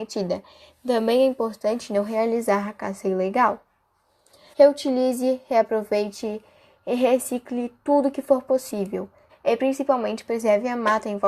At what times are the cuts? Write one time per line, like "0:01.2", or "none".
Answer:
0:04.5
0:09.3

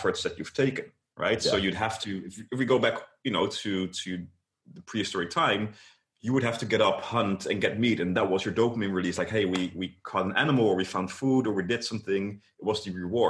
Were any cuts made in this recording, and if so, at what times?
none

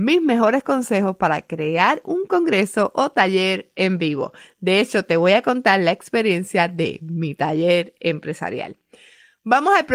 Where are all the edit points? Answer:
none

